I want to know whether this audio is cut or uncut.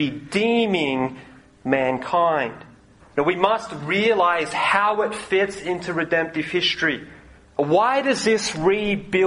cut